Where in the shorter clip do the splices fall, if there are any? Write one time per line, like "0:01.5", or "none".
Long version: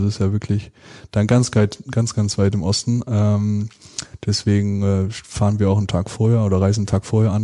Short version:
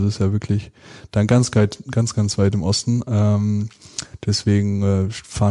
none